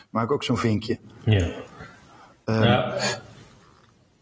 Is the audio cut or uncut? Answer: uncut